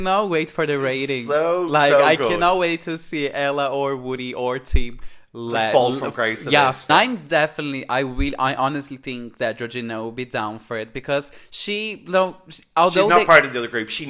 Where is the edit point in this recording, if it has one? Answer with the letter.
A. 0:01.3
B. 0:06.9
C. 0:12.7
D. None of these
B